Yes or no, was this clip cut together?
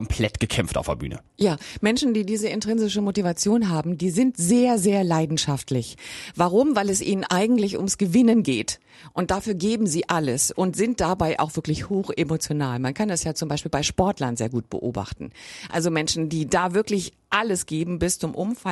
no